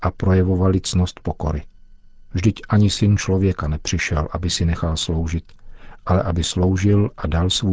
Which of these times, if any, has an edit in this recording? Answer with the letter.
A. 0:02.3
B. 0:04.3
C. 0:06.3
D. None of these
A